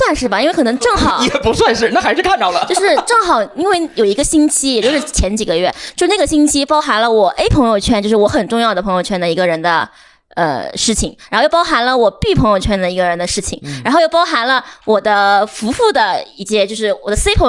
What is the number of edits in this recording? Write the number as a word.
zero